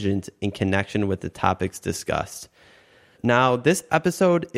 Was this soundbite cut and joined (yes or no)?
no